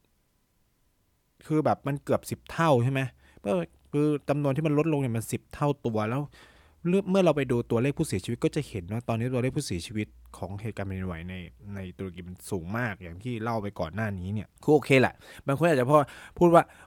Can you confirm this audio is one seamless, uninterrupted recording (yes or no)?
no